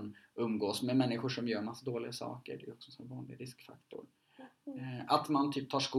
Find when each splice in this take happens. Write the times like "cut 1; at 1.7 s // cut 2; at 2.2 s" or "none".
cut 1; at 4.6 s